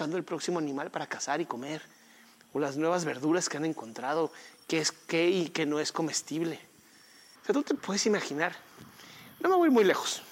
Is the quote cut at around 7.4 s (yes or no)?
yes